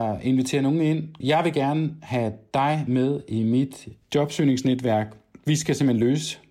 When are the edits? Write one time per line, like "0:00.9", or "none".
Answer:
0:01.2
0:04.0

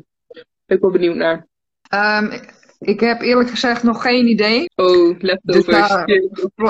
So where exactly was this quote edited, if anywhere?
0:01.9
0:04.7

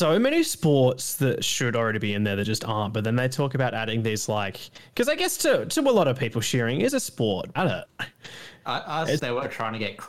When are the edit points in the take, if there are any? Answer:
0:07.5
0:09.2

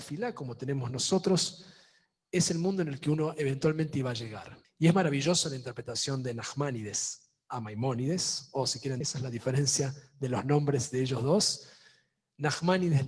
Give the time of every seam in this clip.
0:04.6
0:09.0

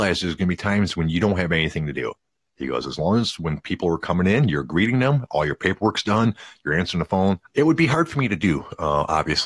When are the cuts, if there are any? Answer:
0:07.5

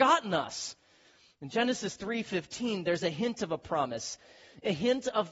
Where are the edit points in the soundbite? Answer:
none

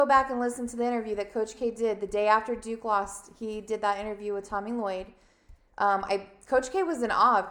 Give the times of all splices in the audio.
none

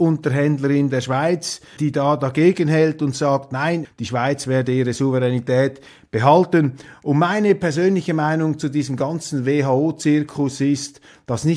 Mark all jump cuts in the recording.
0:01.8
0:03.8

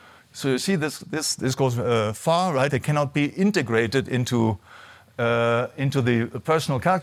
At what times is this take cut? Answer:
0:02.7

